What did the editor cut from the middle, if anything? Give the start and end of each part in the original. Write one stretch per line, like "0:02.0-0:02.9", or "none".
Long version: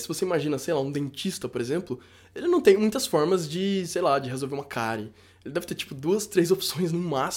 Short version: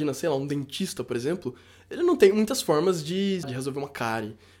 0:03.9-0:04.2